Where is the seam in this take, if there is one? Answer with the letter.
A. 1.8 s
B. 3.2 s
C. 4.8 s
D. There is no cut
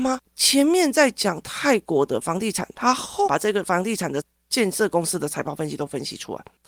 B